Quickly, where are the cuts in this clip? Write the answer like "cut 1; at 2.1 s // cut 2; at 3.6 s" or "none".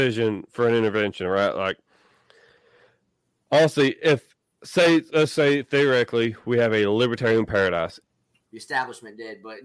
cut 1; at 8.5 s